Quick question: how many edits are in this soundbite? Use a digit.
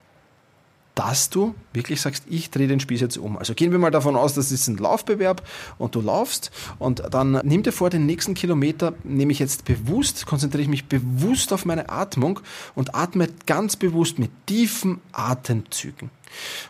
1